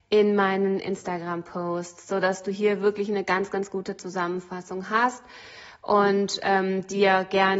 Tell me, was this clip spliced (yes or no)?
no